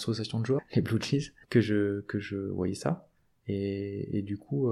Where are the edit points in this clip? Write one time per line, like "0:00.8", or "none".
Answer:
0:01.4